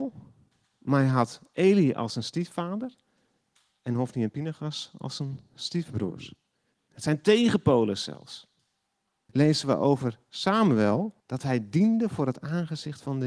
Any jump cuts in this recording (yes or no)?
yes